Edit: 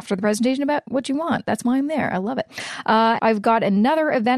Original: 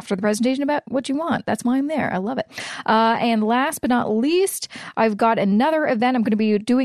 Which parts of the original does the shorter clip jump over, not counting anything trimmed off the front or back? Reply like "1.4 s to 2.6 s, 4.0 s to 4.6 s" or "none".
3.2 s to 4.9 s